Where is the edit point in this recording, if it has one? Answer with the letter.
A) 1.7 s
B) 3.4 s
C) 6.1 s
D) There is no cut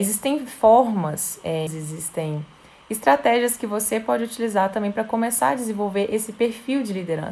A